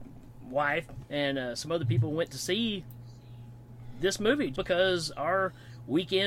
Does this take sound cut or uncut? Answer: cut